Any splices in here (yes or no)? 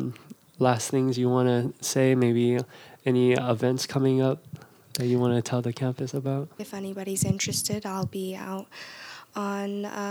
yes